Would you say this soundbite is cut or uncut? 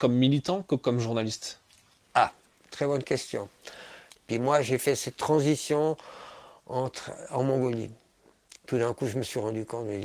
cut